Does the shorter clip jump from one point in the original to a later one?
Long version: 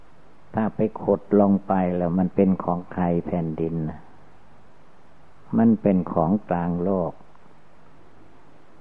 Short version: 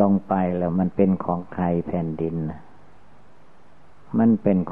no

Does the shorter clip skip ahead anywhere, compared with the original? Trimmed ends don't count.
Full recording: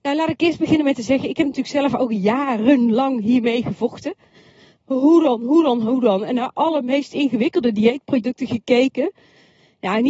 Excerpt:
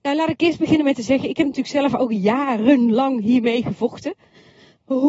no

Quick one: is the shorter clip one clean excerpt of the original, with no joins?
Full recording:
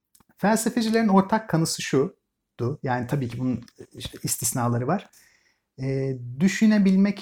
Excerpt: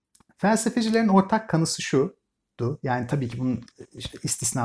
yes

